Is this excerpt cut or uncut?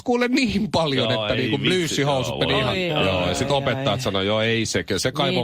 cut